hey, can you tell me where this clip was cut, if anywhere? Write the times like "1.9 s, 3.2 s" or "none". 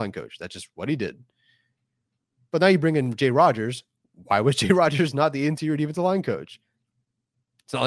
none